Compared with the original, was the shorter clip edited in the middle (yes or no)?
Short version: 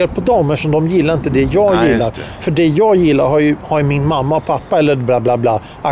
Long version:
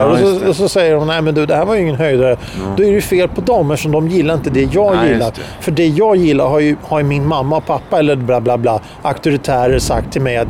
no